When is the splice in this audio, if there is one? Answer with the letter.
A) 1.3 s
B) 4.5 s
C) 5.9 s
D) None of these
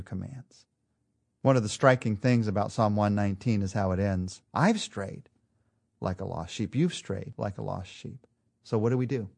B